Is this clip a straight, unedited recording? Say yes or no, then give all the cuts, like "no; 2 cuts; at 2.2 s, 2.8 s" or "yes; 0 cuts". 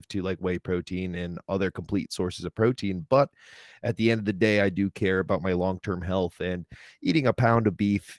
yes; 0 cuts